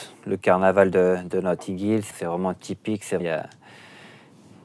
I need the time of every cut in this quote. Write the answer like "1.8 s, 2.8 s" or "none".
2.1 s, 3.2 s